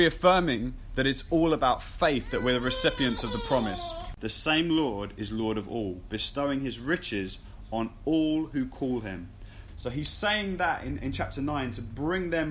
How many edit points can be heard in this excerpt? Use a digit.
2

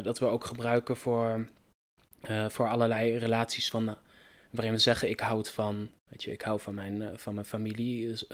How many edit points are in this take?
0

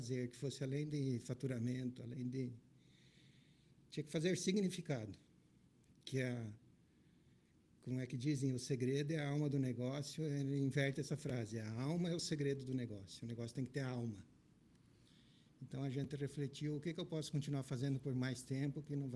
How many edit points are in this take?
0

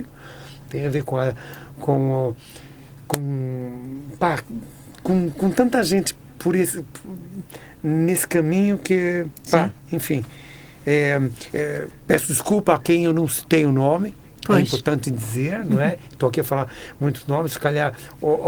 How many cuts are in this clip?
2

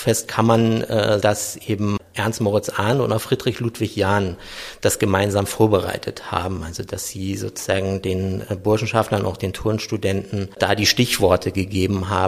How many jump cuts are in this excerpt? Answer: 1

